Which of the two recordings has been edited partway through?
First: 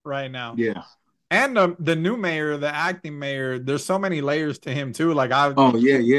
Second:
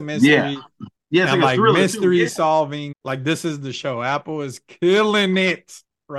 second; 1 cut; at 2.9 s

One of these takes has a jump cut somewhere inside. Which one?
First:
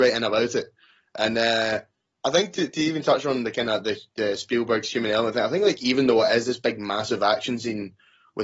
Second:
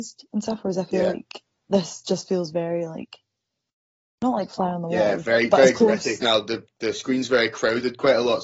second; 1 cut; at 6.2 s

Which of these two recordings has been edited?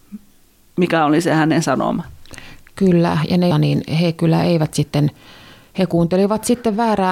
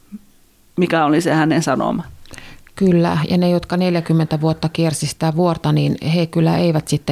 first; 1 cut; at 3.5 s

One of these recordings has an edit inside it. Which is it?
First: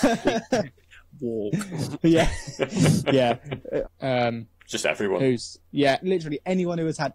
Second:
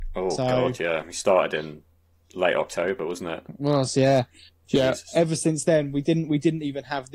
first; 2 cuts; at 3.8 s, 6.0 s

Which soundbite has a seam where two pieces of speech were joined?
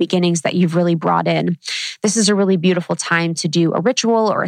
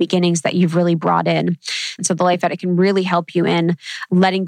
second; 1 cut; at 2.0 s

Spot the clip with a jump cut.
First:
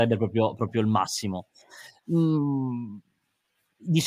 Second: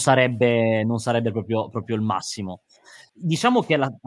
second; 1 cut; at 3.1 s

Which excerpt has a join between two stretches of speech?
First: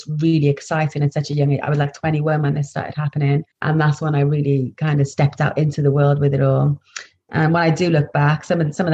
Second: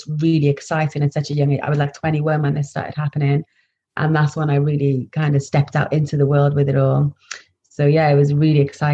first; 2 cuts; at 3.5 s, 7.3 s

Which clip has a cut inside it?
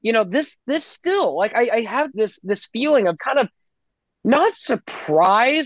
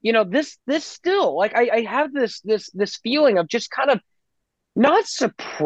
first; 2 cuts; at 2.1 s, 3.2 s

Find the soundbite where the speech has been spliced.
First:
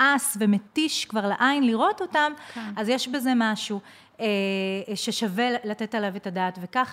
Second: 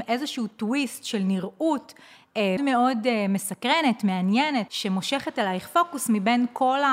second; 2 cuts; at 2.6 s, 4.7 s

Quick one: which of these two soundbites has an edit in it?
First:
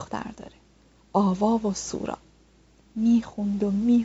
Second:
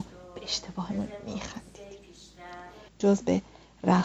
second; 1 cut; at 2.9 s

